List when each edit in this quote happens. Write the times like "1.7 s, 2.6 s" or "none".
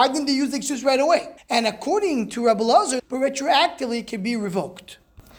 1.4 s, 3.0 s

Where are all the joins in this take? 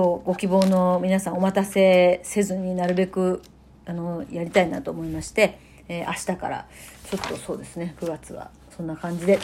none

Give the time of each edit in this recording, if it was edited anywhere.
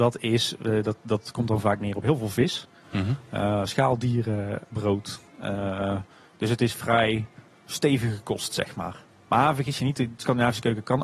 4.7 s

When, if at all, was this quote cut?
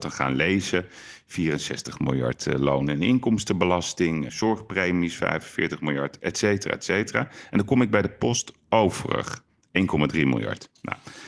4.3 s

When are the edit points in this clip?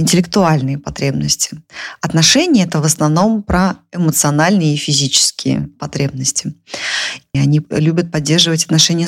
7.3 s

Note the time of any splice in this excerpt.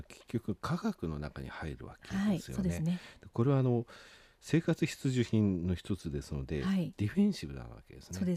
none

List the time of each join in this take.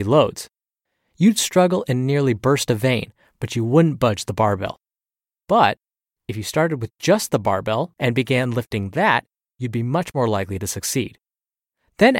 7.9 s

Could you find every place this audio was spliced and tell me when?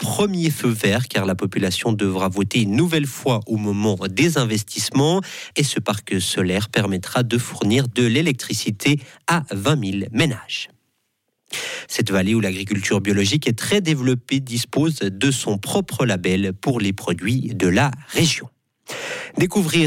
5.5 s, 11.9 s

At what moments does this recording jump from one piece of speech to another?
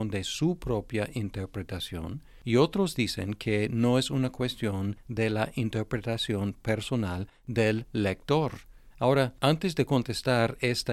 8.9 s

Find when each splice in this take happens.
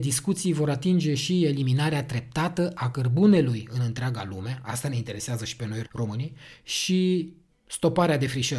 5.8 s

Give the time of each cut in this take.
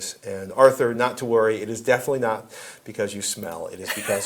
none

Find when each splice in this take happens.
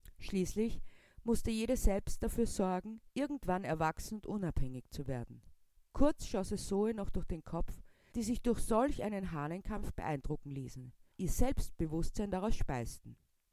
3.1 s, 8.1 s, 11.1 s

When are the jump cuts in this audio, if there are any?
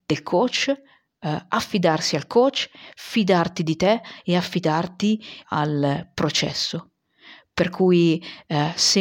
5.4 s

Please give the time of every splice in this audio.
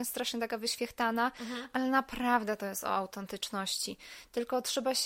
none

